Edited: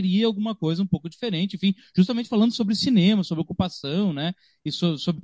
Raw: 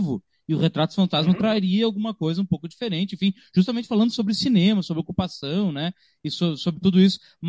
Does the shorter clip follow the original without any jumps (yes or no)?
yes